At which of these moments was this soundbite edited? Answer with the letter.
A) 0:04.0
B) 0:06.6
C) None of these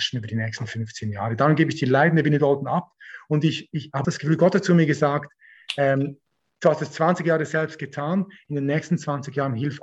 A